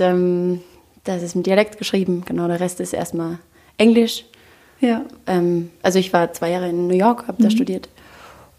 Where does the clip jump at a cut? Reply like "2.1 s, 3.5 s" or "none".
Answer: 5.8 s